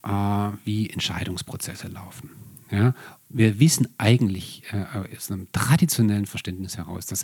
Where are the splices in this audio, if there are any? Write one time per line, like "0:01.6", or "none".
0:03.2